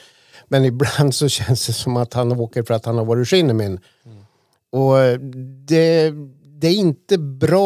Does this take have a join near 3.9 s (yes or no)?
no